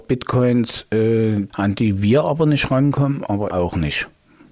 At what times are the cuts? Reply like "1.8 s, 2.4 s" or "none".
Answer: 1.5 s, 3.5 s